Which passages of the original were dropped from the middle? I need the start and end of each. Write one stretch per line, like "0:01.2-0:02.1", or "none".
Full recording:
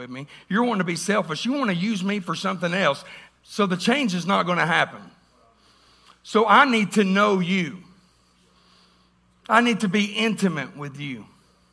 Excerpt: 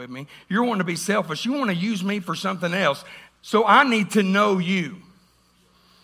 0:03.4-0:06.2